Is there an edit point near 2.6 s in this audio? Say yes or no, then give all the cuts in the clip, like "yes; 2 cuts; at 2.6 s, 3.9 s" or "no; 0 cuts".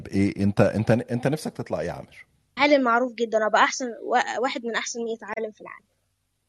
yes; 1 cut; at 2.6 s